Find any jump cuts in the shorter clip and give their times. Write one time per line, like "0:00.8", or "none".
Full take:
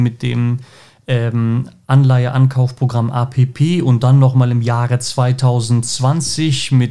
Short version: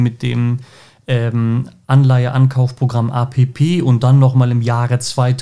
none